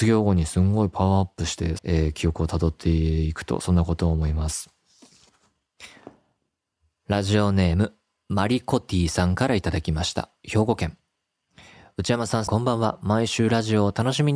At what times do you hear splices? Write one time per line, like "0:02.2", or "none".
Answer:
0:01.8
0:12.5

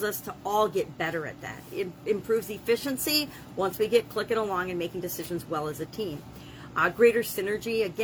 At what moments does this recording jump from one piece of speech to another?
none

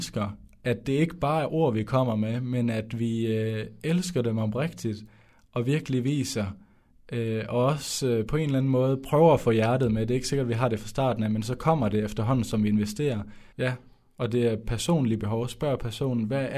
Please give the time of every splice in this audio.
0:13.5

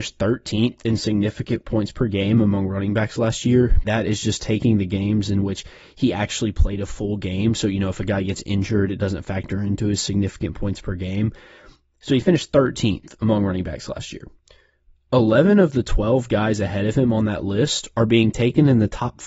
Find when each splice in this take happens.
0:03.8

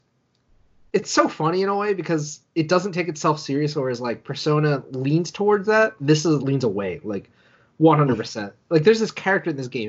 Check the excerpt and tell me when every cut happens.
0:06.4

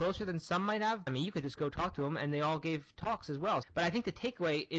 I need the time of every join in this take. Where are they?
0:01.1
0:03.6

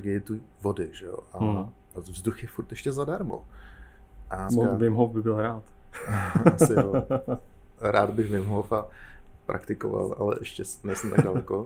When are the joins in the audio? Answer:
0:01.9
0:04.5

